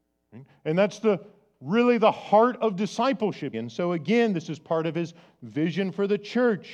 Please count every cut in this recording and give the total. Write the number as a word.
one